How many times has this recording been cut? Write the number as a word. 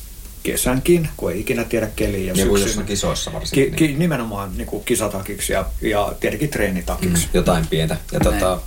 one